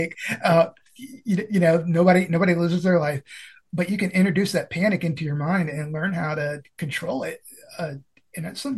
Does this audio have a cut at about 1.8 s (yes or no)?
no